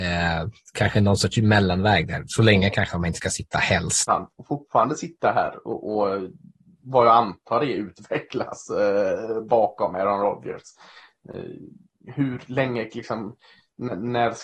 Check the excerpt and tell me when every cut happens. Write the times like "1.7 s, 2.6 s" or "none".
4.1 s